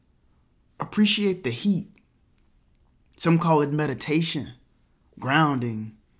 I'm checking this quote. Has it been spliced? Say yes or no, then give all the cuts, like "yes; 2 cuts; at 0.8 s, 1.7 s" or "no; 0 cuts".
yes; 1 cut; at 5.0 s